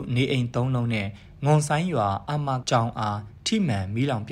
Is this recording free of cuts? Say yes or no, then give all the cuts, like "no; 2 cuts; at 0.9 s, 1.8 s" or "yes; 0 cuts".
no; 1 cut; at 2.6 s